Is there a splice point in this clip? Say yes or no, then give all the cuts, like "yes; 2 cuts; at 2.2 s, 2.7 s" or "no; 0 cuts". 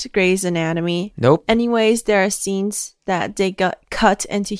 no; 0 cuts